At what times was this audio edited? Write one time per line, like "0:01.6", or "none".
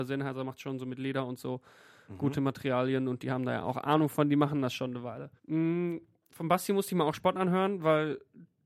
0:05.4